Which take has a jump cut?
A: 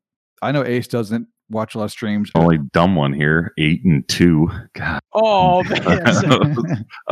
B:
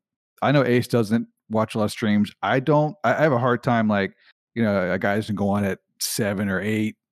A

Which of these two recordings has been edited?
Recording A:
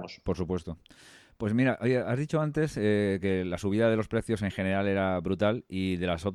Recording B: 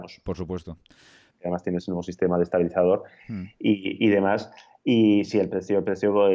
B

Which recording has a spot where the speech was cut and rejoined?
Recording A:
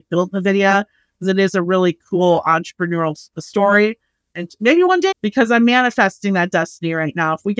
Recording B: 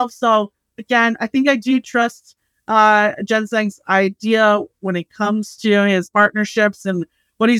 A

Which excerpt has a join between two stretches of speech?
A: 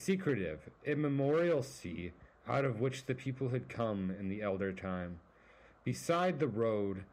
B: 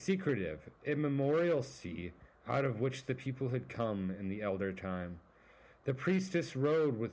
B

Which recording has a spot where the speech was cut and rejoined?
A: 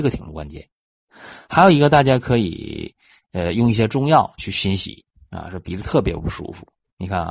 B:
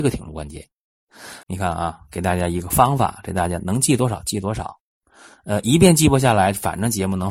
B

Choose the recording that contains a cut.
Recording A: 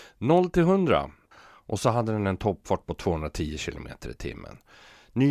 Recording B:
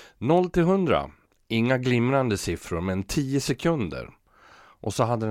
A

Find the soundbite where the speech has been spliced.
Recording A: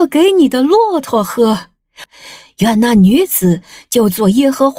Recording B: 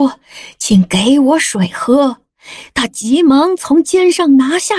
A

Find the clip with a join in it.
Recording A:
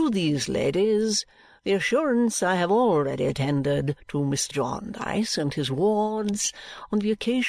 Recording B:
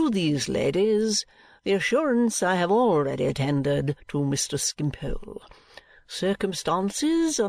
A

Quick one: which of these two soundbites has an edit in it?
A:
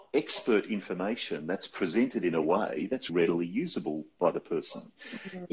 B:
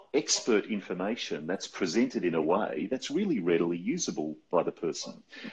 A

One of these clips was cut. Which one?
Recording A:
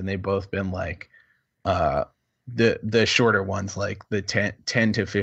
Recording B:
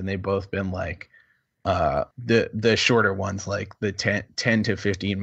B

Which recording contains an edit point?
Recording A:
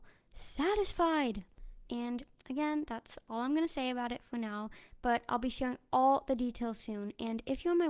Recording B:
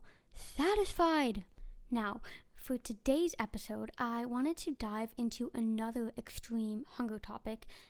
A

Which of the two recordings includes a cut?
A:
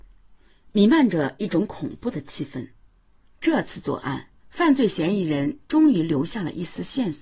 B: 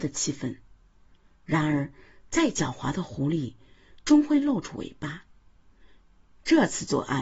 A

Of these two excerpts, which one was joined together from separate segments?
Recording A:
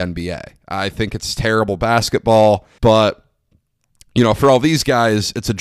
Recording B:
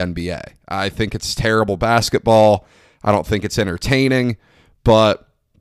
A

